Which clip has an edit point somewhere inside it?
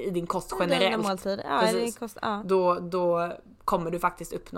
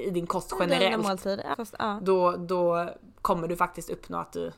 second; 1 cut; at 1.5 s

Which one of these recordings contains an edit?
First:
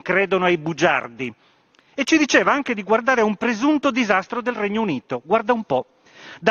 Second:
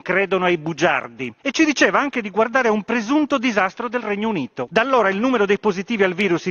second; 2 cuts; at 1.4 s, 4.7 s

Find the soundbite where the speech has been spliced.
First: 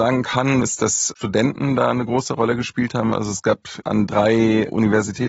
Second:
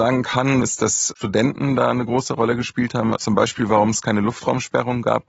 second; 1 cut; at 3.2 s

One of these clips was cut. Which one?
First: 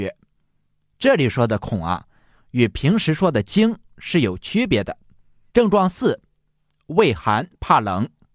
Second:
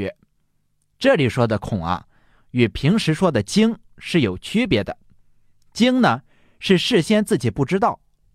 first; 1 cut; at 5.5 s

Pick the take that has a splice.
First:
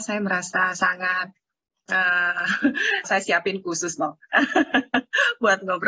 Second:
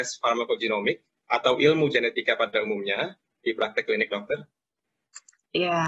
first; 1 cut; at 3.0 s

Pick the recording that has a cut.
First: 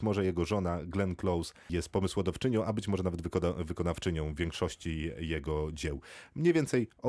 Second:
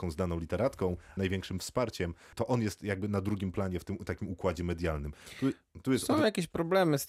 second; 1 cut; at 1.2 s

